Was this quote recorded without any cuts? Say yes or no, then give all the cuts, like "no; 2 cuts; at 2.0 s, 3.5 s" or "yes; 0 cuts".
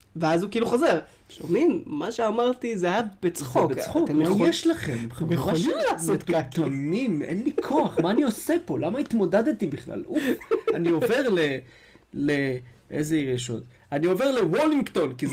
yes; 0 cuts